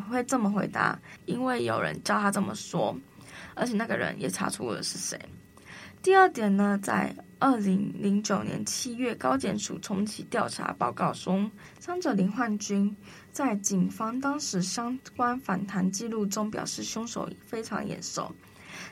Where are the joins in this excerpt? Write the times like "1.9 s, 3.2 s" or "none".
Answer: 1.2 s